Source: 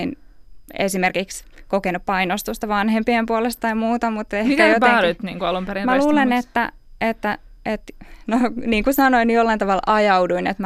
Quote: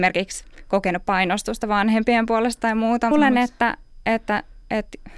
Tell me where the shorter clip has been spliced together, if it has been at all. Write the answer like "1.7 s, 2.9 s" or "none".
3.1 s